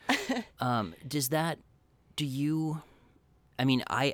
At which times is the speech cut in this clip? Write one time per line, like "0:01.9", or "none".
none